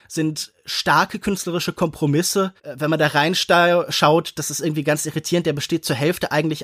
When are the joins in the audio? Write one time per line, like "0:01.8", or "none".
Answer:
0:02.6